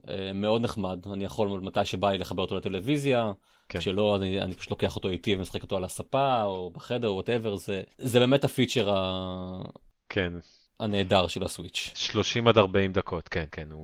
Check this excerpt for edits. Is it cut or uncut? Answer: cut